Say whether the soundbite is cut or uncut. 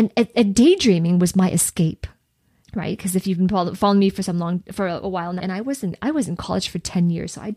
cut